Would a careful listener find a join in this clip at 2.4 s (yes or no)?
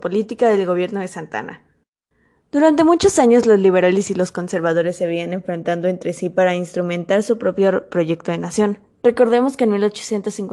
no